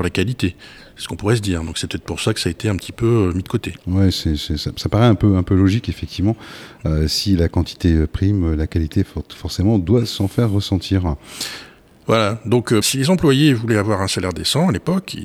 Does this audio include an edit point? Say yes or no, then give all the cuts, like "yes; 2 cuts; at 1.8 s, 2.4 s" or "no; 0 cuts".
yes; 1 cut; at 12.8 s